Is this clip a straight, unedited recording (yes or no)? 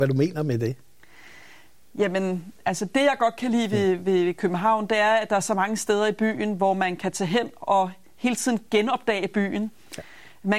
yes